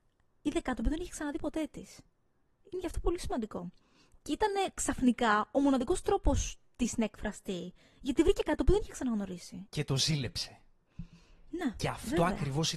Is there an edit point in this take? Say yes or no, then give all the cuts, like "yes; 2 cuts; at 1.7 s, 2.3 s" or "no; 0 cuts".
yes; 1 cut; at 9.7 s